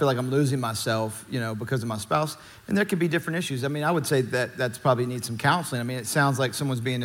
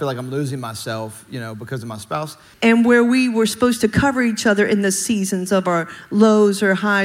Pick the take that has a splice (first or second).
second